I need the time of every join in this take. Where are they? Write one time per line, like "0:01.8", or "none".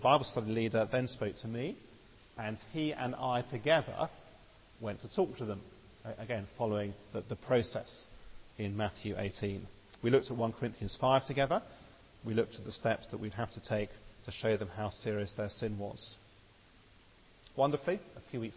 none

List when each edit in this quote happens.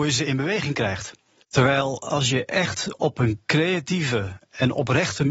0:01.4

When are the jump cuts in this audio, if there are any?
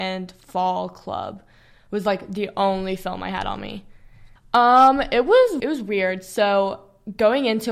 0:04.4
0:05.6

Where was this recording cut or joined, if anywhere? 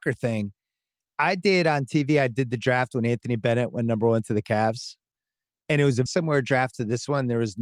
0:06.1

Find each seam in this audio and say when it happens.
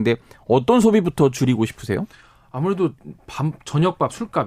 0:03.5

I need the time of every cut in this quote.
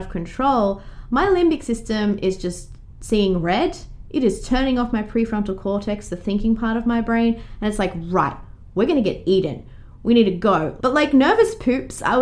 0:10.8

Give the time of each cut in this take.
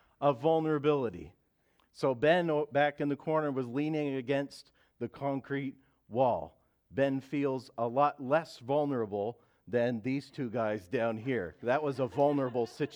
0:01.8

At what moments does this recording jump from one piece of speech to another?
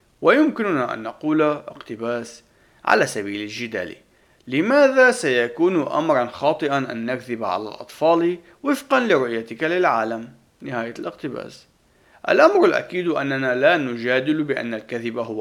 none

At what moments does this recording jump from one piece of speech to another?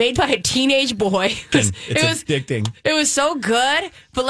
0:01.5

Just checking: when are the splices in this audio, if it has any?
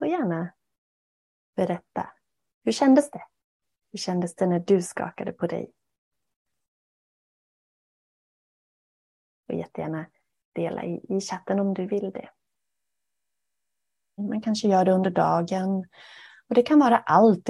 0:14.2

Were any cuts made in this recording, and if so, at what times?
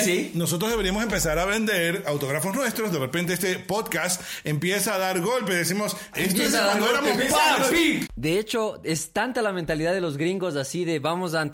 0:06.1
0:08.1

